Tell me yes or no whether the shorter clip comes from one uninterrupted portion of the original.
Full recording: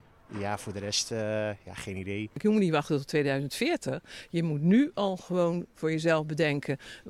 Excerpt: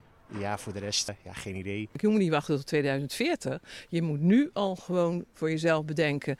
no